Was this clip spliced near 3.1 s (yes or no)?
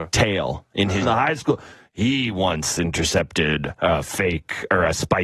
no